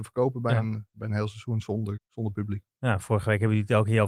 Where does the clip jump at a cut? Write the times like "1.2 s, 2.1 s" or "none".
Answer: 2.0 s